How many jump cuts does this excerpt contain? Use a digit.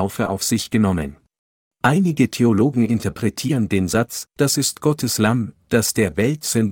2